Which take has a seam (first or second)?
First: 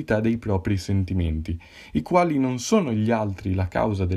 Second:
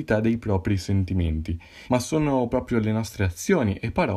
second